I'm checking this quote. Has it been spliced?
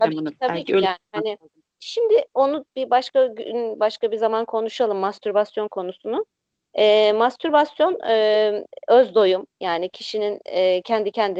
yes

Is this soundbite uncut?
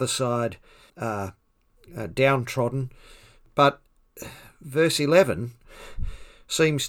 yes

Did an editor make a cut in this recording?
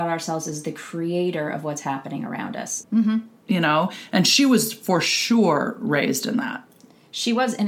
yes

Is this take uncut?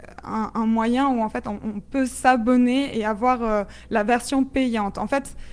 yes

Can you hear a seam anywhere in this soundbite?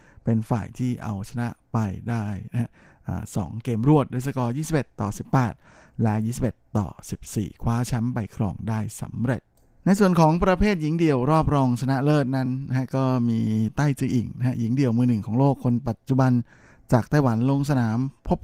no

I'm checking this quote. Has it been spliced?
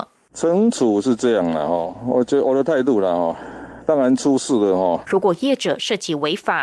yes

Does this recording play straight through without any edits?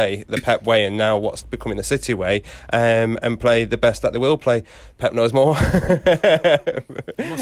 no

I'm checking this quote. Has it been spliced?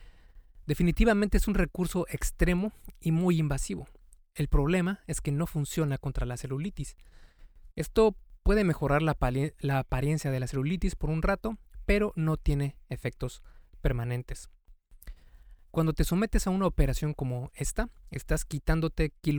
yes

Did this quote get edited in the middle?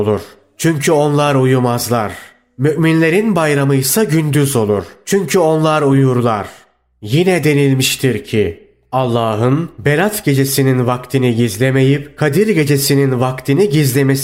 no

